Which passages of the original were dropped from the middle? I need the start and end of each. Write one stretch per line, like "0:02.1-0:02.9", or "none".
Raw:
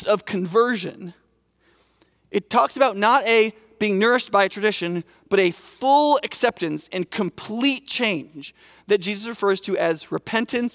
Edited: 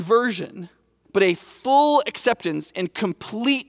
0:01.5-0:05.2